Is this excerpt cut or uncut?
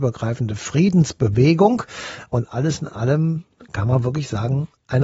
uncut